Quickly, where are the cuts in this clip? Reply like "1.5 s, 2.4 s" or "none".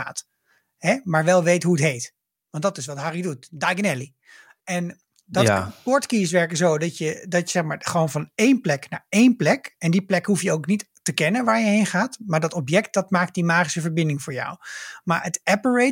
none